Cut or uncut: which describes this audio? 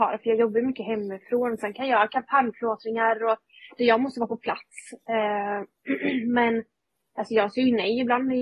uncut